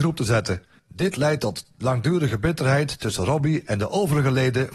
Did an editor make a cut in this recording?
no; 0 cuts

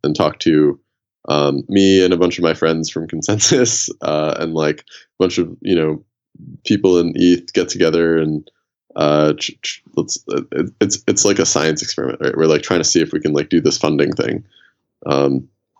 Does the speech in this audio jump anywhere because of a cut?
yes; 1 cut; at 1.7 s

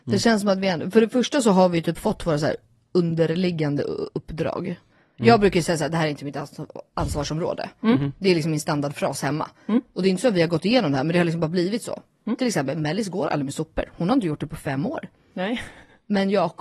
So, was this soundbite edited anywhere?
no; 0 cuts

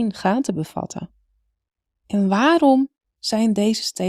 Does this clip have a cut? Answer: yes; 1 cut; at 2.0 s

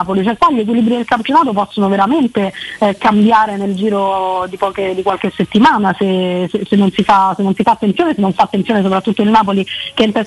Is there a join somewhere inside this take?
no; 0 cuts

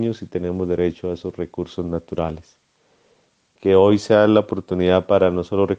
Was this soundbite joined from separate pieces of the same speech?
yes; 1 cut; at 3.5 s

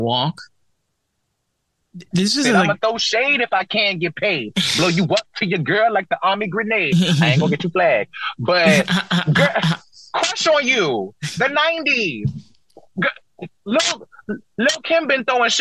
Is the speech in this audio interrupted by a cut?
yes; 1 cut; at 1.8 s

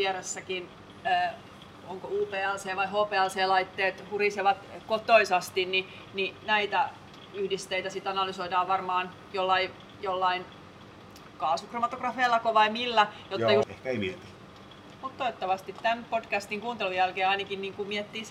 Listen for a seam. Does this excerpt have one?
yes; 2 cuts; at 13.6 s, 15.0 s

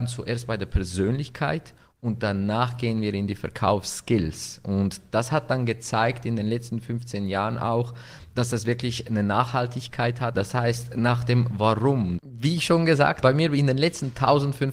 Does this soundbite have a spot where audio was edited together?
yes; 3 cuts; at 10.3 s, 12.2 s, 13.2 s

